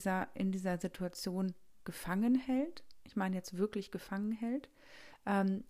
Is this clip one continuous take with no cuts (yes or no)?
yes